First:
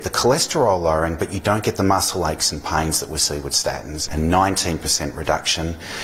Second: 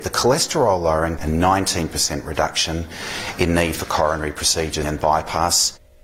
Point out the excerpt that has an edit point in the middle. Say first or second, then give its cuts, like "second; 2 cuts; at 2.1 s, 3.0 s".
second; 2 cuts; at 1.2 s, 4.8 s